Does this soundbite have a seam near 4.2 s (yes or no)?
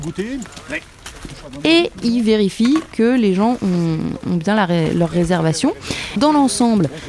no